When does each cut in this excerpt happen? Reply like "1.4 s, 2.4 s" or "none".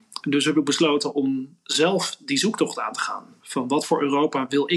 3.4 s